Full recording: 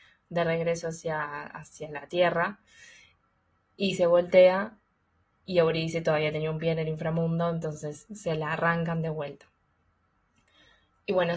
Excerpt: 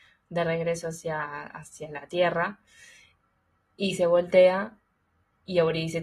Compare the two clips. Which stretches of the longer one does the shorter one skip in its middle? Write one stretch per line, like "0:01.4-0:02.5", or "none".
none